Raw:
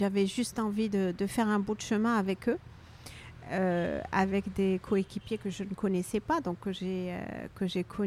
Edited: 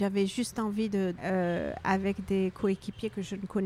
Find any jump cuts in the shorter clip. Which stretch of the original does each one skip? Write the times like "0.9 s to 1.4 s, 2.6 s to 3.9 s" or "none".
1.2 s to 3.5 s